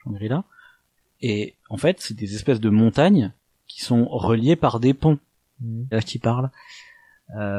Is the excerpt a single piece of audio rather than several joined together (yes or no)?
no